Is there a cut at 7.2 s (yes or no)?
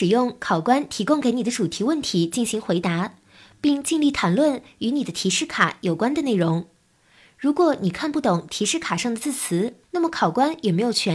no